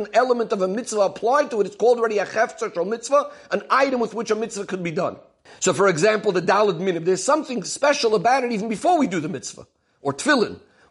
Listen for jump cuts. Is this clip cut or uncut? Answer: cut